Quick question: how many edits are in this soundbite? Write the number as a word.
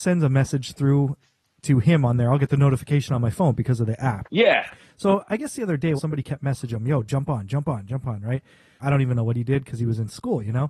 three